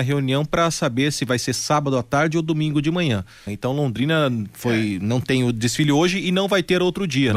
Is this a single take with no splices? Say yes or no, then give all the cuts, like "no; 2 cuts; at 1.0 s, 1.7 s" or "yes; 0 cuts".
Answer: no; 1 cut; at 3.5 s